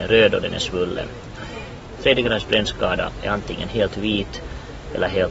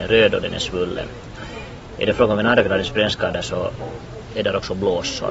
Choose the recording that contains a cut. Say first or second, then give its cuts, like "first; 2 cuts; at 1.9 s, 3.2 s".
first; 1 cut; at 2.0 s